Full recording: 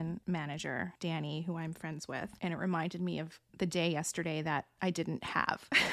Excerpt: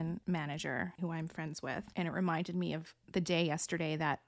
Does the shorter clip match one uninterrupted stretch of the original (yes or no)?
no